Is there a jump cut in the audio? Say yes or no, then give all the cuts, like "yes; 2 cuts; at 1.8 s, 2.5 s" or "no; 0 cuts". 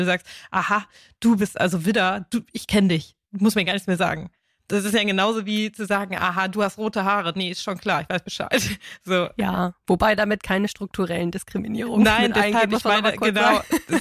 no; 0 cuts